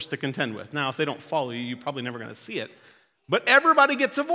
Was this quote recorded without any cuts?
yes; 0 cuts

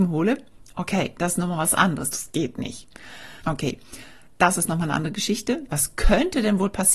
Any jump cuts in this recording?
yes; 3 cuts; at 2.1 s, 3.4 s, 5.7 s

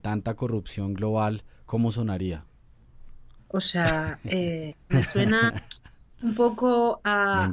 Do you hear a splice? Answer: yes; 2 cuts; at 3.4 s, 4.9 s

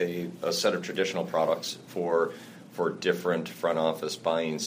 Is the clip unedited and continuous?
yes; 0 cuts

